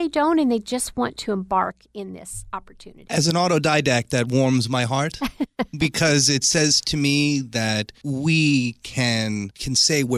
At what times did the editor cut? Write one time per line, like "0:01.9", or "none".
none